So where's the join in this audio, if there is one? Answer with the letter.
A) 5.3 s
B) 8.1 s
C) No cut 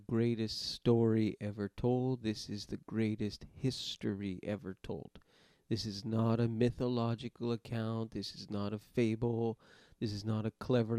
C